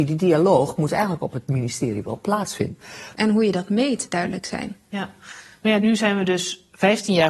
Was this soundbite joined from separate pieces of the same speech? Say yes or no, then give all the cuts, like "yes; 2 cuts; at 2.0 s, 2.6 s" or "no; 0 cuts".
yes; 2 cuts; at 3.1 s, 5.8 s